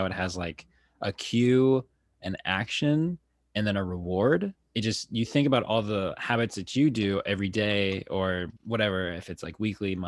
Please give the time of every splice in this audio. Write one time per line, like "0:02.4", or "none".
0:04.6
0:08.6